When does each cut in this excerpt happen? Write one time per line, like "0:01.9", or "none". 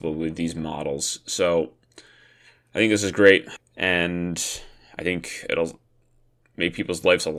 0:03.6